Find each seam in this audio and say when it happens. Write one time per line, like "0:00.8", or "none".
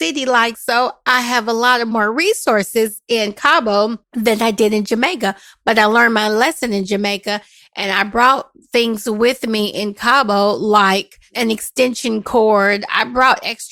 0:04.0